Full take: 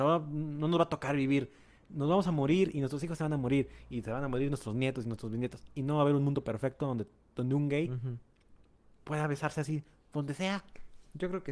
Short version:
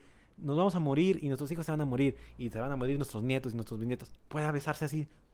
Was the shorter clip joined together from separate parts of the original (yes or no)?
yes